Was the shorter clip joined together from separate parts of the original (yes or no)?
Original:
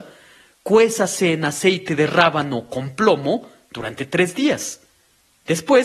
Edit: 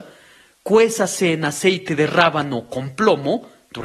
no